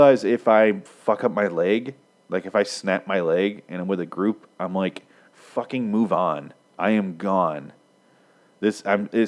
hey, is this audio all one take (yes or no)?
yes